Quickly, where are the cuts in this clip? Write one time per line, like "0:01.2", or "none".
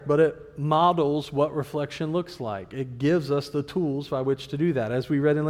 none